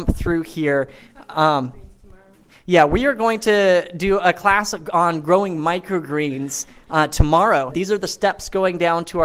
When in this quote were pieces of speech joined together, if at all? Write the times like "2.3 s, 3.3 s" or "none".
7.7 s